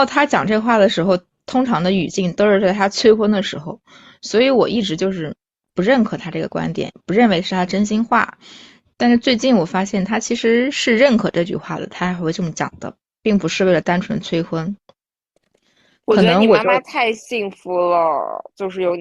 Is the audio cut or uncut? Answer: uncut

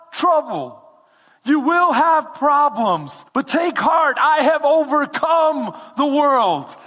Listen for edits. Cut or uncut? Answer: cut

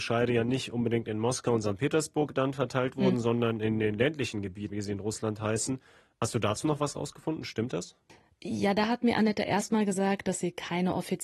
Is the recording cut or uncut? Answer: cut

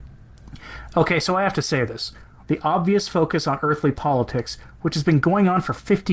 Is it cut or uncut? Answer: cut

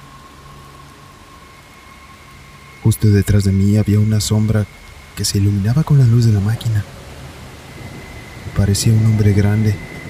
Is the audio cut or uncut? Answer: uncut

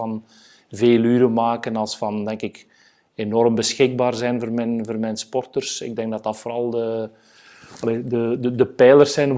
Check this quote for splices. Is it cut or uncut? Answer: uncut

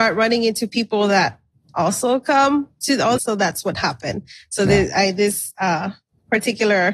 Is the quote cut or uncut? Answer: cut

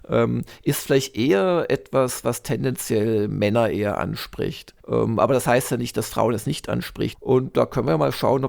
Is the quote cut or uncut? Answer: cut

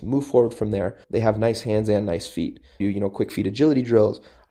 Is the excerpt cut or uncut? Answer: cut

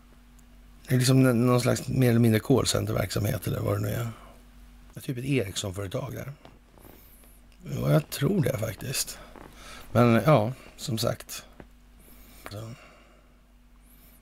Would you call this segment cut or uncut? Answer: cut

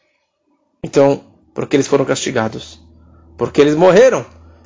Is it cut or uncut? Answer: cut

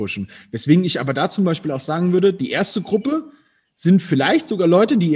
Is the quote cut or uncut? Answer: uncut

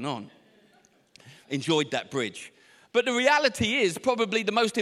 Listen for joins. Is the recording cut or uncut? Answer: cut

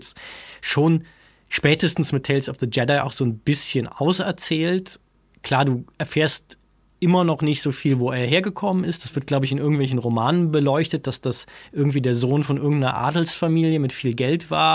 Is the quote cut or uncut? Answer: uncut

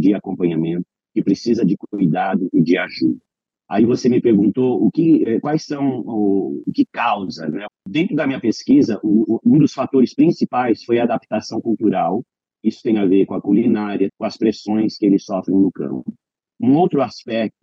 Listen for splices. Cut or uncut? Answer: cut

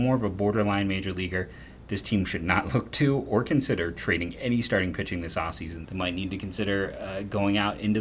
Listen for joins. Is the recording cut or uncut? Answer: cut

